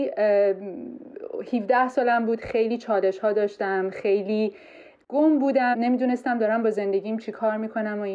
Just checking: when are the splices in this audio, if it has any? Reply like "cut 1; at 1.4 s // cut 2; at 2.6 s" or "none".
none